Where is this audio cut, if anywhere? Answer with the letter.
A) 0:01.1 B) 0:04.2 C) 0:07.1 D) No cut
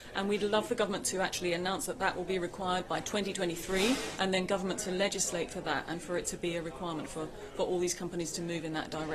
B